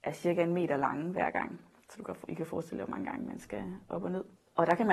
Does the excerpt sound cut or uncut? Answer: uncut